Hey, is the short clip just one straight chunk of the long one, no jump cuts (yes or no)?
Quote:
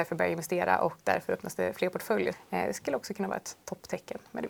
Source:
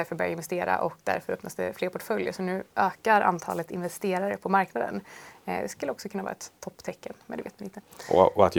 no